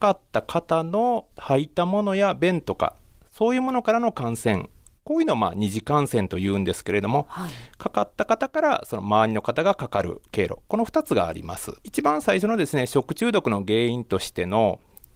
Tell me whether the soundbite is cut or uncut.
cut